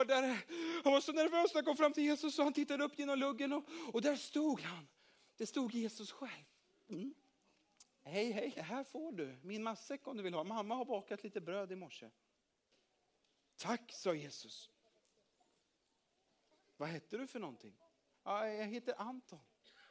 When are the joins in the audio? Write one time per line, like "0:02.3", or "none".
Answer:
0:08.5